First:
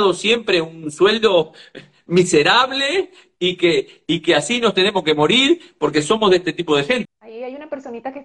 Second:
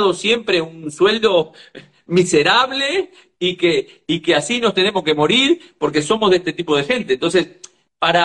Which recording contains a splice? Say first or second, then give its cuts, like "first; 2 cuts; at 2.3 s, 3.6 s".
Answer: first; 1 cut; at 7.0 s